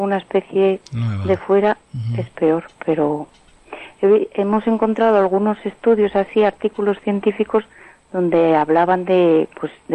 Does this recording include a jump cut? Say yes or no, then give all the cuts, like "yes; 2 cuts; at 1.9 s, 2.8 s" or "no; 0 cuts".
no; 0 cuts